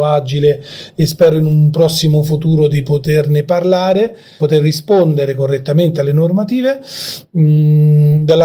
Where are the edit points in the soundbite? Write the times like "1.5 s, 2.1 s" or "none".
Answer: none